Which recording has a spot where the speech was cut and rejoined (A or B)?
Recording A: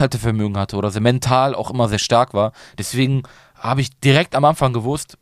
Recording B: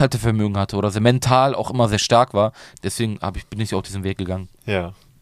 B